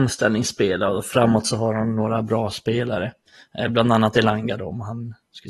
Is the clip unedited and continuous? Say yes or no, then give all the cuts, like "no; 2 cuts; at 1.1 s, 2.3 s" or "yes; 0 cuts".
yes; 0 cuts